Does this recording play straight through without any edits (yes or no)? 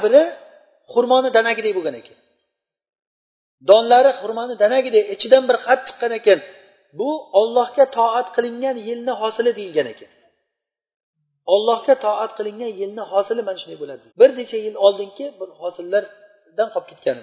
no